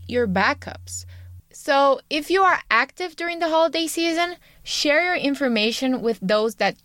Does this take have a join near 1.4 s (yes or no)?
yes